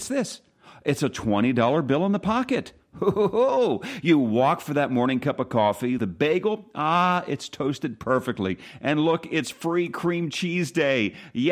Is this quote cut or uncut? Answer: cut